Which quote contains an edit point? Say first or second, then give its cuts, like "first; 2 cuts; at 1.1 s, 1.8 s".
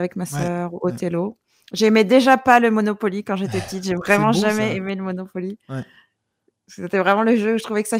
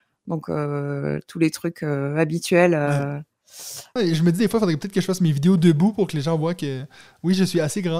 second; 1 cut; at 4.0 s